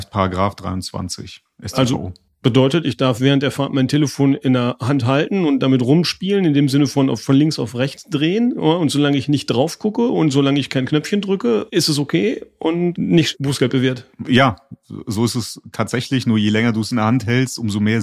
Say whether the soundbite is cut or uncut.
uncut